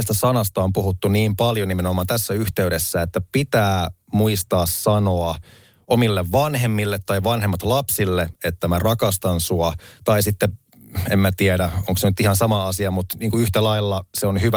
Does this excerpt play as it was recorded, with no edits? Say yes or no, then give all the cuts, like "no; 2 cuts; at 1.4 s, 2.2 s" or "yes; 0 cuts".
yes; 0 cuts